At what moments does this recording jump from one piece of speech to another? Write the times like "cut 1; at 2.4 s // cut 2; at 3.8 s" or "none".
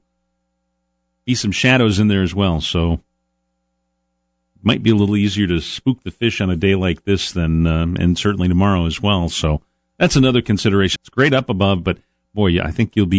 cut 1; at 11.0 s